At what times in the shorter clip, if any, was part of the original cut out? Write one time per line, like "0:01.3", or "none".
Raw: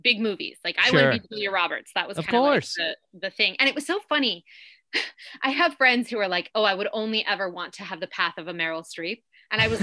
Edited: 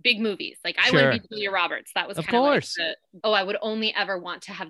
0:03.2